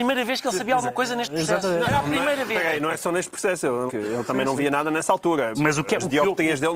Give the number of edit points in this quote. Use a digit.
2